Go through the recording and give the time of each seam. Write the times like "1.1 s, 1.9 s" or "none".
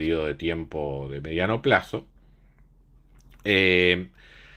none

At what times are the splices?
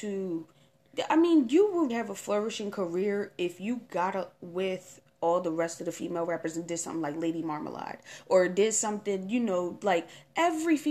1.9 s

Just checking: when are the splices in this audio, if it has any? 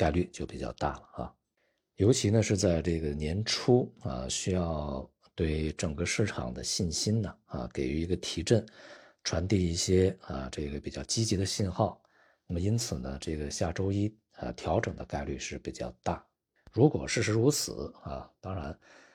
none

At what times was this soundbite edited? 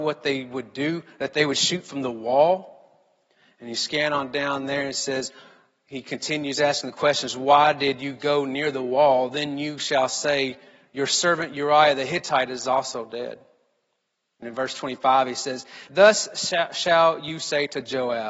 14.4 s, 15.9 s

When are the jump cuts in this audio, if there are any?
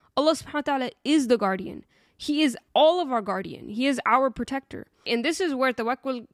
2.7 s, 5.1 s

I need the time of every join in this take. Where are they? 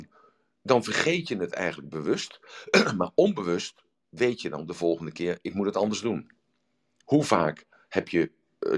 7.0 s

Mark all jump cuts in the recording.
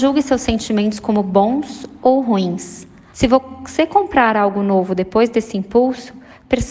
3.1 s

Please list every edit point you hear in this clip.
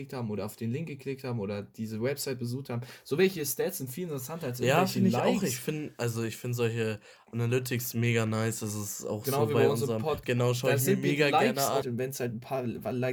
10.2 s, 11.8 s

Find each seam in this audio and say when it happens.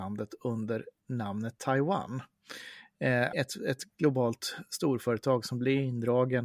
3.3 s

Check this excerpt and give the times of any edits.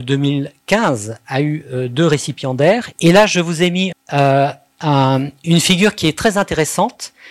2.9 s, 3.9 s

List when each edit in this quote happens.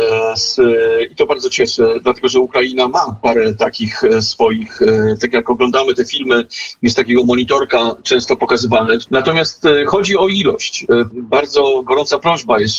9.1 s, 11.1 s

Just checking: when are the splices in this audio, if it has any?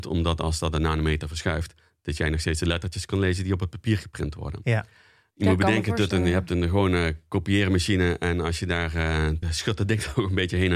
5.3 s, 9.4 s

